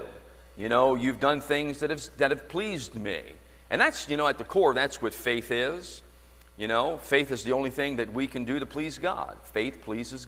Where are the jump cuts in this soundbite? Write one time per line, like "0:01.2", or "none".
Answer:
none